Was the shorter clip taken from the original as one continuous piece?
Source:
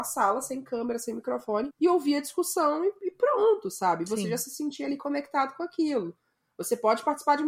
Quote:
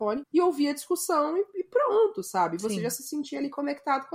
yes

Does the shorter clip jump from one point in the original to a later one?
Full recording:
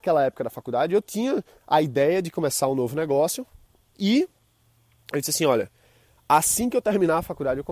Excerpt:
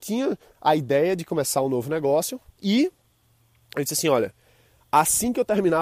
yes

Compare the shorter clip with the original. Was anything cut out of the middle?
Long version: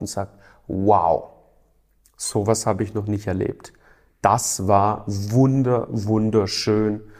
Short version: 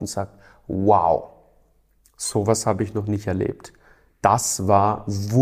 no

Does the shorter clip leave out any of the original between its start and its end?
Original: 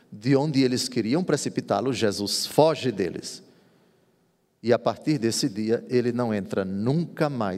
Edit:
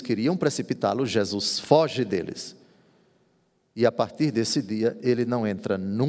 no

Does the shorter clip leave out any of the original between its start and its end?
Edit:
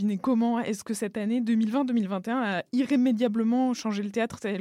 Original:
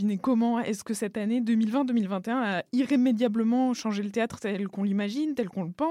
no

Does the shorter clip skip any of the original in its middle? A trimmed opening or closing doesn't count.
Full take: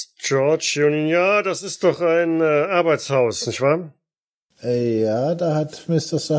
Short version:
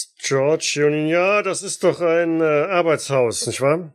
no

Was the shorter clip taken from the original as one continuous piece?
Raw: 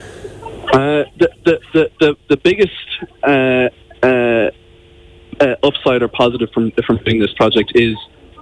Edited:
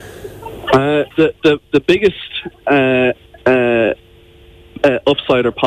no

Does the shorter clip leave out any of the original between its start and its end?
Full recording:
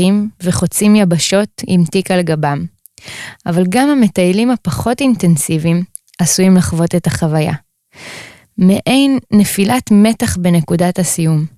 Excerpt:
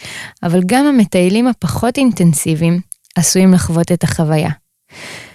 no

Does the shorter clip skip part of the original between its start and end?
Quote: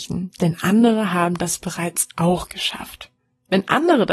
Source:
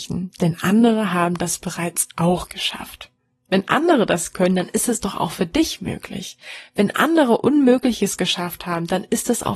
no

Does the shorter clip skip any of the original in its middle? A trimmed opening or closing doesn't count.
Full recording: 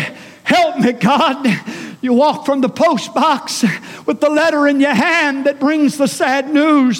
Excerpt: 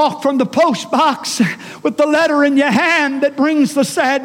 no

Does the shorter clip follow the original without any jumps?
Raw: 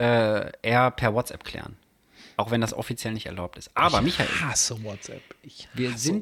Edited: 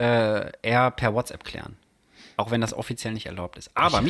yes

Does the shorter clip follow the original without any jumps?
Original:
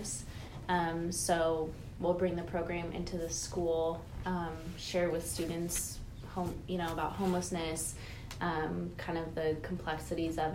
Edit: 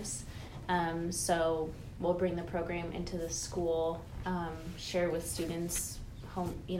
yes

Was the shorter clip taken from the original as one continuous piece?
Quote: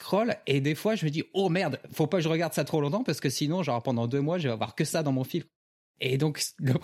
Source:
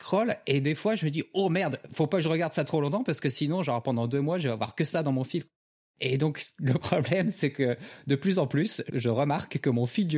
yes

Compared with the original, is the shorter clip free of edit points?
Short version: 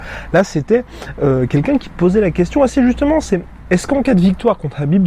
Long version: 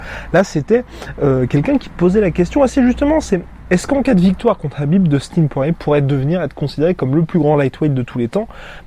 yes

